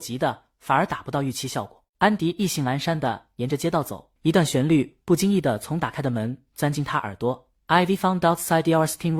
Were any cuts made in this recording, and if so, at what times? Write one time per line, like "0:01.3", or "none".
0:01.9
0:04.2